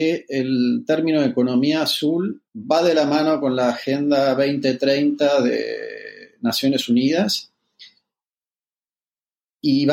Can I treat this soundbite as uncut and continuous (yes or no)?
no